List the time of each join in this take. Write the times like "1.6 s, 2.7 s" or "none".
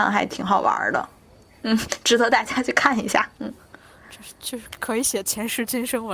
none